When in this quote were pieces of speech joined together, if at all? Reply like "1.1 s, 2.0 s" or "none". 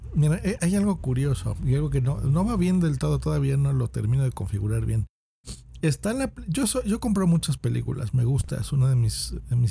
none

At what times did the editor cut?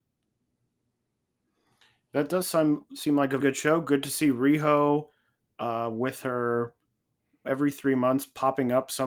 3.4 s, 7.4 s

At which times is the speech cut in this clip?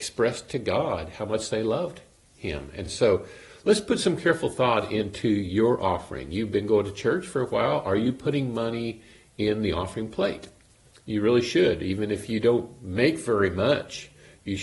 none

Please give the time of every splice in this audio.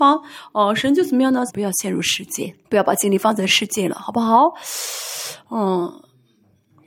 1.5 s, 2.6 s

